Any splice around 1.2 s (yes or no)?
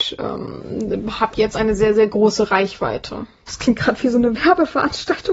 no